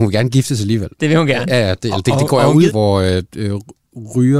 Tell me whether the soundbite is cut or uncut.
cut